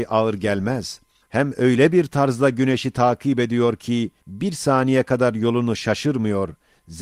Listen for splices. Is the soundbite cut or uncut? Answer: cut